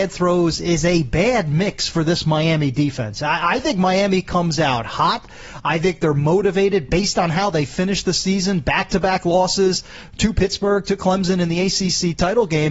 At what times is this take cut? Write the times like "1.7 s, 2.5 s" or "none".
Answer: none